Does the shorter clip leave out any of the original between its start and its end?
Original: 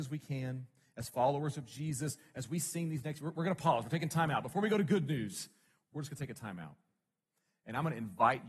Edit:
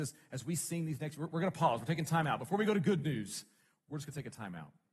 no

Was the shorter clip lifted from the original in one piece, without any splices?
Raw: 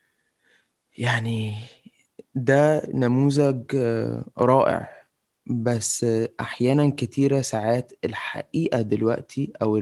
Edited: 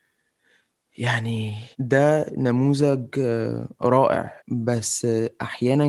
no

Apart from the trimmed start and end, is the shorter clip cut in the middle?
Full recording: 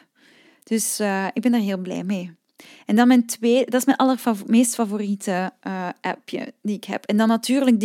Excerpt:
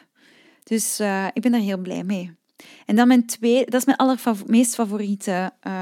no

